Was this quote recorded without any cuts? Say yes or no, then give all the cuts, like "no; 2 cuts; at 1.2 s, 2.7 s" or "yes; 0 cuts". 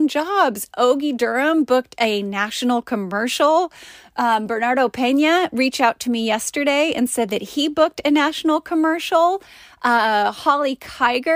yes; 0 cuts